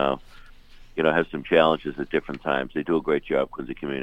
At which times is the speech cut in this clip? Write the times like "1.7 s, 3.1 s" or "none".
none